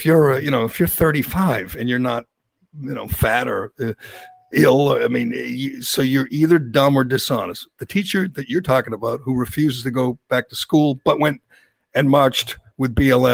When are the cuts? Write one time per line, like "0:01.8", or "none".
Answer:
0:04.5
0:07.8